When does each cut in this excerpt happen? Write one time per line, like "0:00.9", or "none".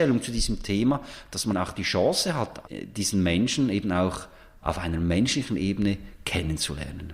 0:01.5
0:02.7